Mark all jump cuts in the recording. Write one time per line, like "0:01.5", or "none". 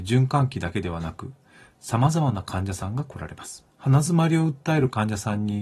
0:03.7